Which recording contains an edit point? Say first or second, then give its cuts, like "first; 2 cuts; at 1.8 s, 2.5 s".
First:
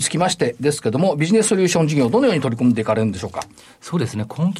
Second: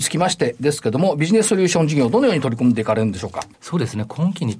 second; 1 cut; at 3.5 s